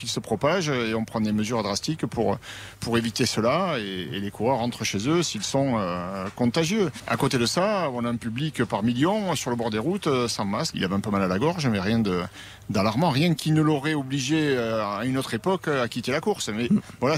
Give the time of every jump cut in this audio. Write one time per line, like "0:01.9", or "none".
0:02.7
0:07.0
0:10.7